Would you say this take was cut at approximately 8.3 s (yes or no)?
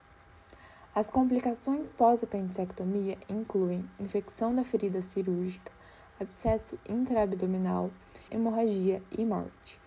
yes